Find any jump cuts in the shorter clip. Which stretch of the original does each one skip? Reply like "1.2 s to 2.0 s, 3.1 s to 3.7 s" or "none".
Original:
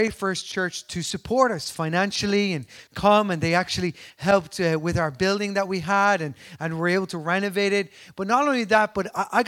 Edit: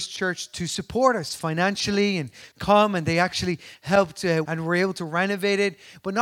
4.8 s to 6.6 s